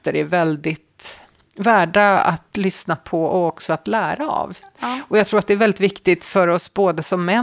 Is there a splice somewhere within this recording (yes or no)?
no